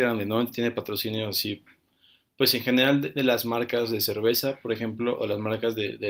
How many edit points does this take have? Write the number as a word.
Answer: zero